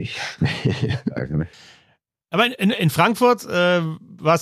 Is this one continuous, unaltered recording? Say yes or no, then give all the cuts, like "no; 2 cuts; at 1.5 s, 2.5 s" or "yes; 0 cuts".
no; 1 cut; at 1.5 s